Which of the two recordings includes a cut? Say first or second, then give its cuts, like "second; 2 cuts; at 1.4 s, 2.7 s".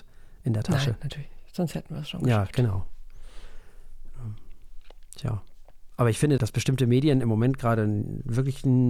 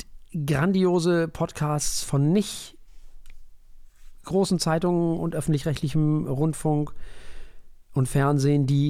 first; 1 cut; at 6.4 s